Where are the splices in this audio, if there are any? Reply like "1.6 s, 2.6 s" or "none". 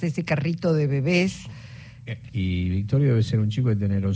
2.3 s